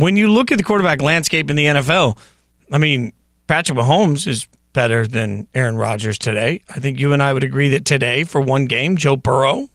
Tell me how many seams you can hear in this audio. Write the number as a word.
zero